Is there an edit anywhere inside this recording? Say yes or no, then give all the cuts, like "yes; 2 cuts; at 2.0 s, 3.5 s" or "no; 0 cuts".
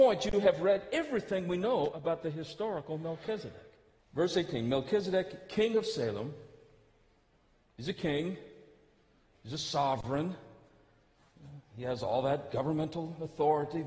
yes; 1 cut; at 4.0 s